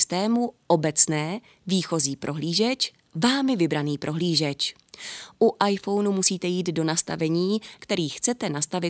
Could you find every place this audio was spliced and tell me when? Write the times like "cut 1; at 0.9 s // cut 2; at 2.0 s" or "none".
cut 1; at 7.8 s